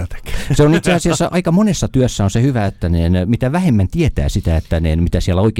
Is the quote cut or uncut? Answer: uncut